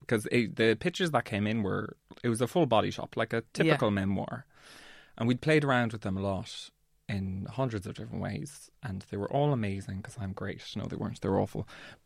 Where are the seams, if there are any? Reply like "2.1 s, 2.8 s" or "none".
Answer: none